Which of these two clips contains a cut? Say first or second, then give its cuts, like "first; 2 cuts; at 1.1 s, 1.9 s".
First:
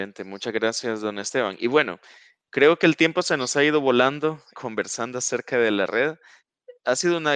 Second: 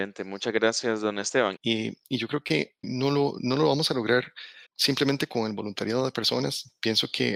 second; 3 cuts; at 1.6 s, 2.8 s, 4.7 s